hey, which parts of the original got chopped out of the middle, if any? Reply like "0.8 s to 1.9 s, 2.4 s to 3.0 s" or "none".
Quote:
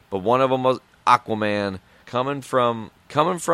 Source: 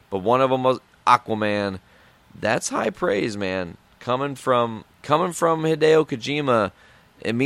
2.0 s to 4.0 s